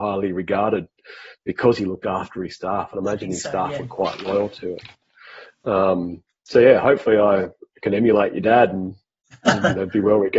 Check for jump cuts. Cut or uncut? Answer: uncut